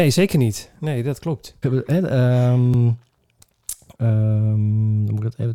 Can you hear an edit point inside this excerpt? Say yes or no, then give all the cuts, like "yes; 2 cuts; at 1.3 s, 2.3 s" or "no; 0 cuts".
yes; 2 cuts; at 1.6 s, 3.9 s